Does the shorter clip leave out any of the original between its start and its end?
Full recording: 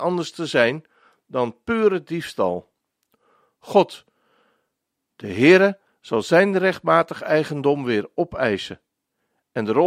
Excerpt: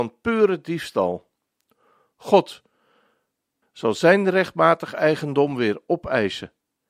yes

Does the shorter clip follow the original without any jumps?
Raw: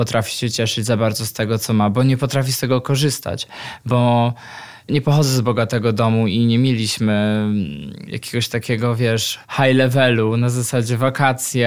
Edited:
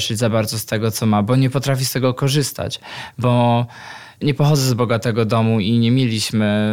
yes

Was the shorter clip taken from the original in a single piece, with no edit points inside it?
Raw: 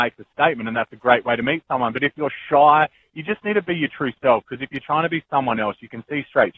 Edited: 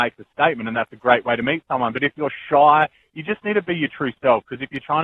yes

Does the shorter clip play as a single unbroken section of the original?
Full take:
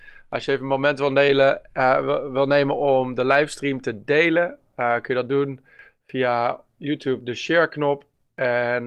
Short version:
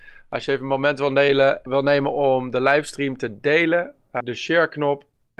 no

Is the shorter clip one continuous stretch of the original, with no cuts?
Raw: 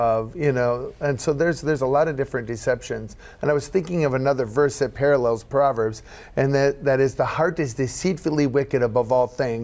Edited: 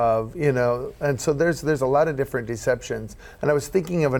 yes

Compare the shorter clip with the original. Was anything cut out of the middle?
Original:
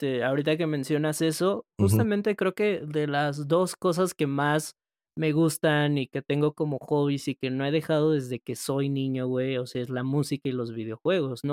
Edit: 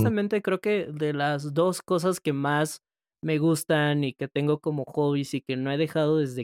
no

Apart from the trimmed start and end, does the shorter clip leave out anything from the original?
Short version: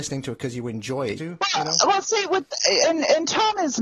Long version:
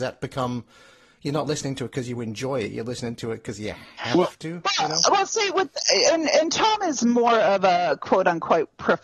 yes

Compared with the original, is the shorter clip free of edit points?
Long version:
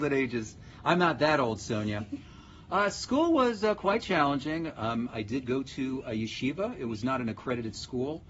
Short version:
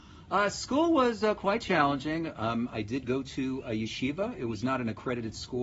yes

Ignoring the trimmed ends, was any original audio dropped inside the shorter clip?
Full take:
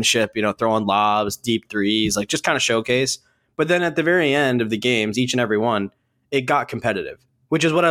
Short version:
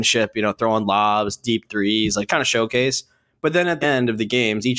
yes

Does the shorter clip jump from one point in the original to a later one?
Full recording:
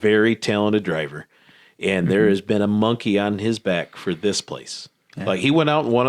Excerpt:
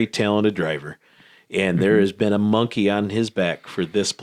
no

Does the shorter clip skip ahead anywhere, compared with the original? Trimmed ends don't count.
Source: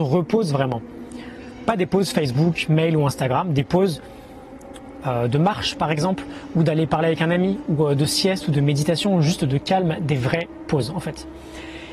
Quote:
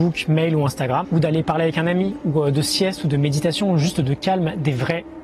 yes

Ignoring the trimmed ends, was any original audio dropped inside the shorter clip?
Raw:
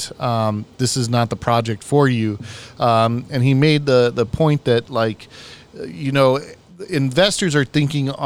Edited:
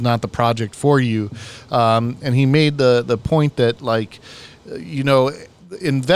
no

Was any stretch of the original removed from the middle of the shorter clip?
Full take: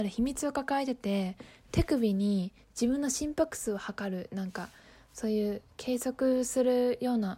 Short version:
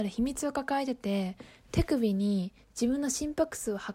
no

